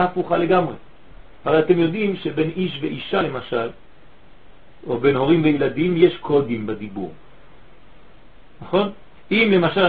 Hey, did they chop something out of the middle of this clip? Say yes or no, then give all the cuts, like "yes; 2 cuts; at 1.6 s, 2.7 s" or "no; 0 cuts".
no; 0 cuts